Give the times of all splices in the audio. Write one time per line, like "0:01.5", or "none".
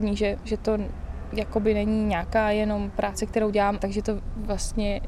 0:03.8